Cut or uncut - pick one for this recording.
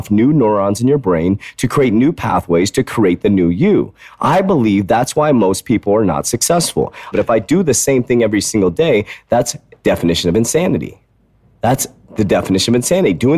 cut